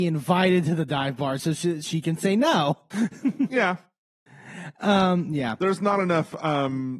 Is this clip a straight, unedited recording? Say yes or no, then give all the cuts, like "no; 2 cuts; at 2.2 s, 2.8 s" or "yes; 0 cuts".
yes; 0 cuts